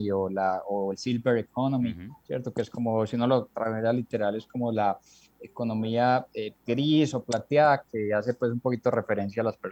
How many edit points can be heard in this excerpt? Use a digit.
1